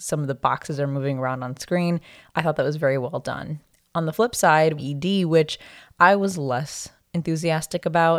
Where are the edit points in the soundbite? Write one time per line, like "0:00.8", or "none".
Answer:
0:04.8